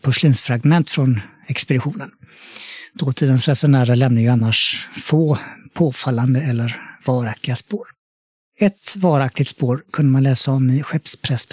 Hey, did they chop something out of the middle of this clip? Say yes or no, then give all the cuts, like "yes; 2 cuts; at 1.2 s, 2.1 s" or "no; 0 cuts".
no; 0 cuts